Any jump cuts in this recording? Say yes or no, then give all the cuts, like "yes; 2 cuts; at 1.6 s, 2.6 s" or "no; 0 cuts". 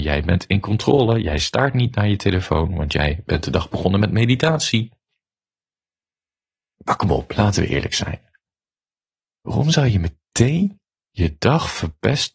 no; 0 cuts